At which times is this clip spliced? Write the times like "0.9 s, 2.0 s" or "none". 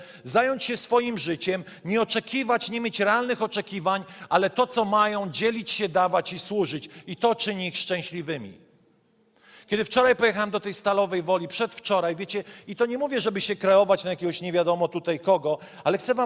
none